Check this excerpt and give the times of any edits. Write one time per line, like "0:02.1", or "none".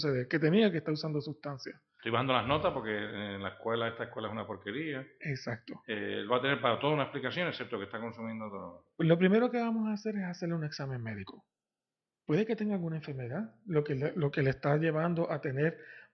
0:02.0